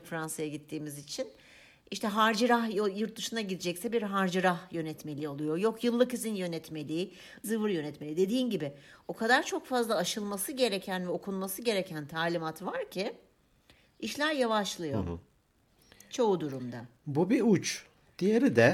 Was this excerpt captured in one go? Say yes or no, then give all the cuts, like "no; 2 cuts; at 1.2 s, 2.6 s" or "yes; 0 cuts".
no; 2 cuts; at 7.4 s, 17.0 s